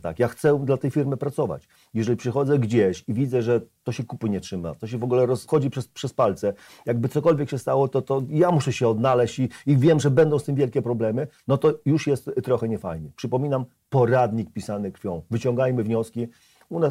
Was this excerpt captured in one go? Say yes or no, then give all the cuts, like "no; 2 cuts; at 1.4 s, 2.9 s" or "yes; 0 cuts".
no; 1 cut; at 5.5 s